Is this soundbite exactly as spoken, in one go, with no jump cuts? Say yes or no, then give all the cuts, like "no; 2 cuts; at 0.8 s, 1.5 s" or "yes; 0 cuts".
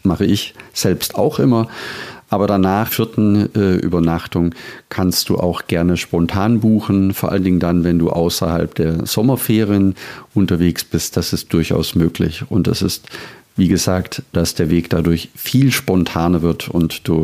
no; 2 cuts; at 2.9 s, 14.3 s